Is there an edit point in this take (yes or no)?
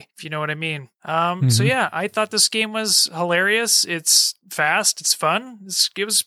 no